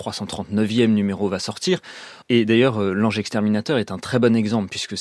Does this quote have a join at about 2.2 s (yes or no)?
yes